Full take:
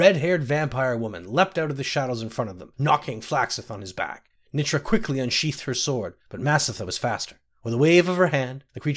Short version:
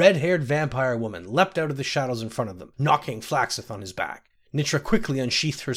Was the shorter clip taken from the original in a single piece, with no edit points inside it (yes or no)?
yes